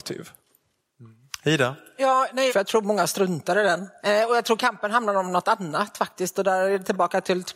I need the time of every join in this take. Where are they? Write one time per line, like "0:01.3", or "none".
0:02.5
0:04.0